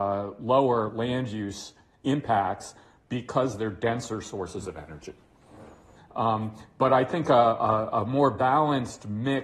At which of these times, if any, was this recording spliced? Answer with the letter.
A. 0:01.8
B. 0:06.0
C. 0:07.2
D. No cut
B